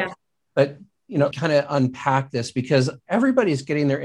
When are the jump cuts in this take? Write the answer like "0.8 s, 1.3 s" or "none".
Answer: 1.3 s

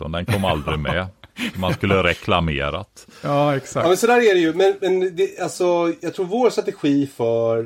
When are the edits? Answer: none

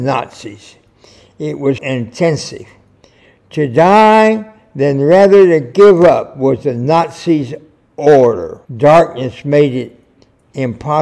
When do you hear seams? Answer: 1.8 s, 8.7 s

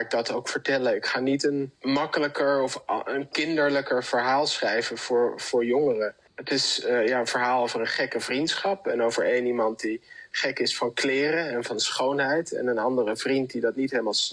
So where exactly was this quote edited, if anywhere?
none

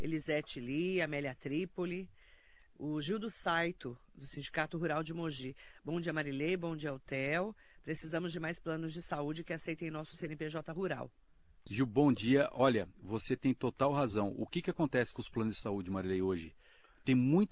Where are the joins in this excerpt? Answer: 11.7 s

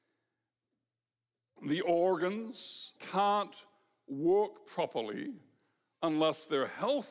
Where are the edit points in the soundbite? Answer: 3.0 s

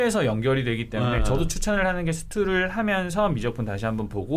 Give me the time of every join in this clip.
none

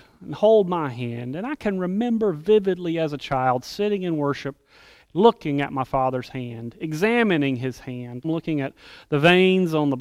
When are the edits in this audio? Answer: 8.2 s

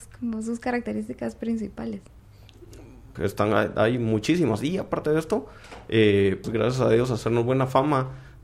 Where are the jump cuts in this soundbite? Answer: 3.2 s, 6.4 s

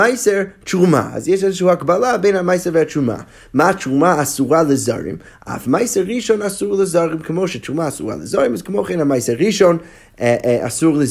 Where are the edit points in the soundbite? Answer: none

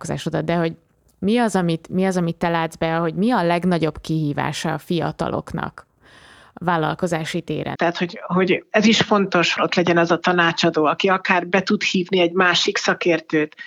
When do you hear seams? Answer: 7.8 s, 9.6 s

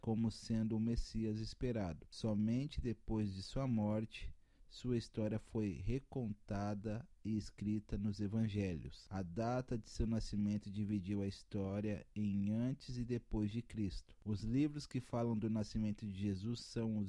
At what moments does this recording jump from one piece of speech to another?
none

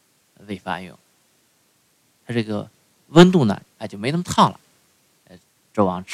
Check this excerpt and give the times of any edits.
2.2 s, 3.6 s

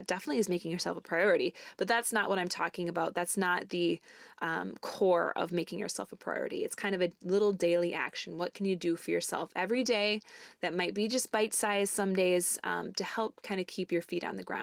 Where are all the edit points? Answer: none

